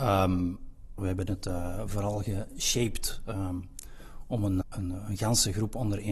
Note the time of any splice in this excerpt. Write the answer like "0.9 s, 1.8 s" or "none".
1.0 s, 4.6 s